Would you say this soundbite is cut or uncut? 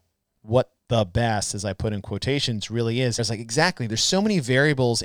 cut